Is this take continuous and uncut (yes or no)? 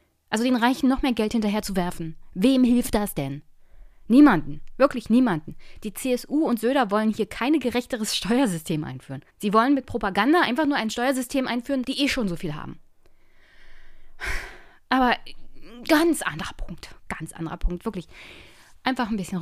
no